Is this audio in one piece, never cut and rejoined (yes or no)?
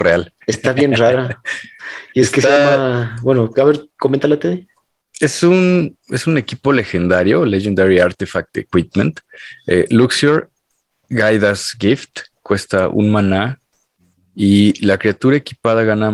yes